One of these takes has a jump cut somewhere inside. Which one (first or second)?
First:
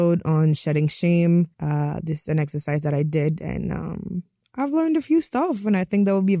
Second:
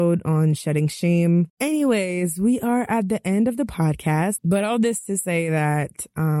second